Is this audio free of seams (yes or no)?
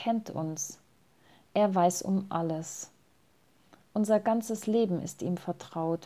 yes